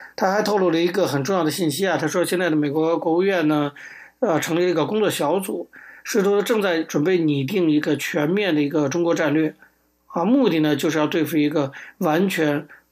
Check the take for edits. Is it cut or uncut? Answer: uncut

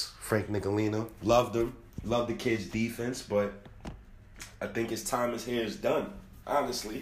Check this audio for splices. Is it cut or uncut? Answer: uncut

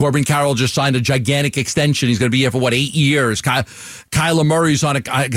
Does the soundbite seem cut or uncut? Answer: uncut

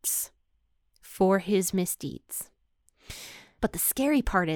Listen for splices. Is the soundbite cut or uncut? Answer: cut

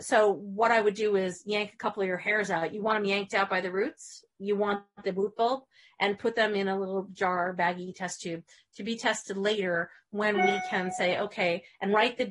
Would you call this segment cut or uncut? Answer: uncut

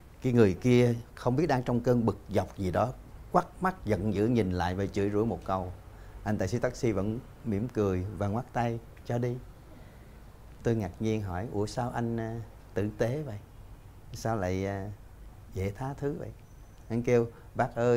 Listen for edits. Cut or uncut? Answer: cut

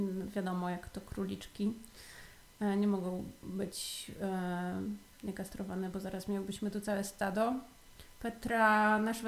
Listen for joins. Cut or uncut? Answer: uncut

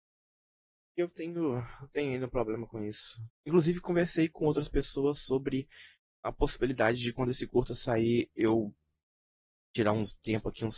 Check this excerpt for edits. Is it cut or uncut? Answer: cut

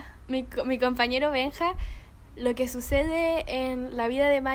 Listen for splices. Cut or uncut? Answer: cut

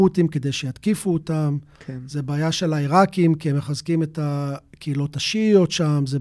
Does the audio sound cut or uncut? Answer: uncut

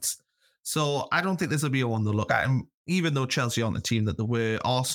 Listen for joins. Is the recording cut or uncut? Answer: uncut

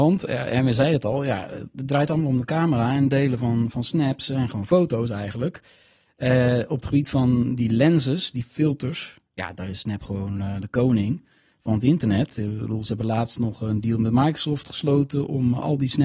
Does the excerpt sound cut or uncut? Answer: uncut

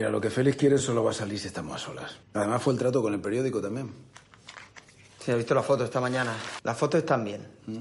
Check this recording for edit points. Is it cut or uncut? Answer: cut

